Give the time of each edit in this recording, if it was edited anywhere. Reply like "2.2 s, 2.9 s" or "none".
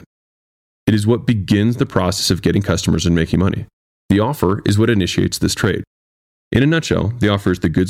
3.9 s